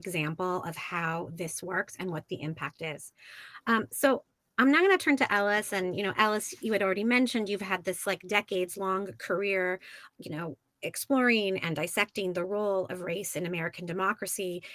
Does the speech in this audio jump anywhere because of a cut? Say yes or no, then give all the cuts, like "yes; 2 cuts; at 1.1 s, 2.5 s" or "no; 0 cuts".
yes; 1 cut; at 10.1 s